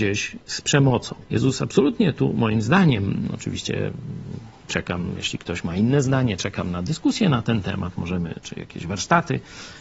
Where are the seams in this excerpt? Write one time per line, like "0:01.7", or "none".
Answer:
0:01.2